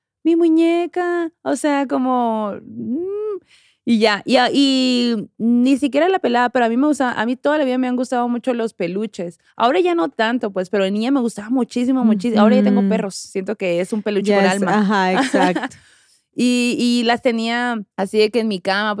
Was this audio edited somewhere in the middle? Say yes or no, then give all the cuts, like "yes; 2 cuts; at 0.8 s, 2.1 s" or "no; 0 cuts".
yes; 1 cut; at 17.9 s